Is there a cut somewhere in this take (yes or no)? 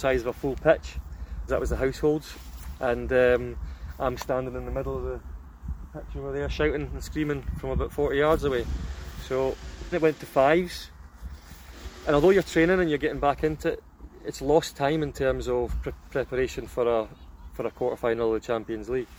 yes